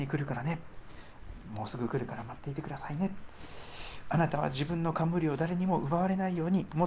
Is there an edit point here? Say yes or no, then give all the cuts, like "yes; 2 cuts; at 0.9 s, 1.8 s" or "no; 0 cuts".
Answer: no; 0 cuts